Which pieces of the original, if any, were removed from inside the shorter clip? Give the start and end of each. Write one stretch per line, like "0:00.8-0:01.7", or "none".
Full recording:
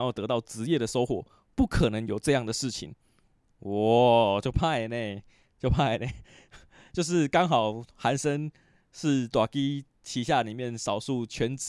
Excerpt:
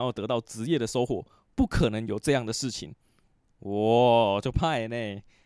none